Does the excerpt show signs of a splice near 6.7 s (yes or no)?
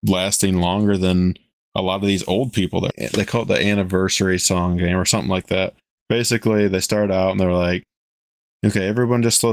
no